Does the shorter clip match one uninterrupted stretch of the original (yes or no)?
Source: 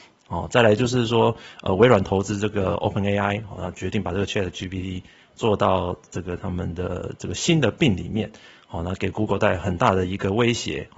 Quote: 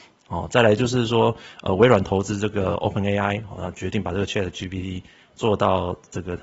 yes